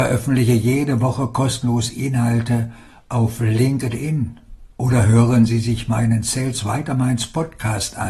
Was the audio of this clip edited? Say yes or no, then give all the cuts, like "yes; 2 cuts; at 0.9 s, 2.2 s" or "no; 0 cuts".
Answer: yes; 1 cut; at 4.7 s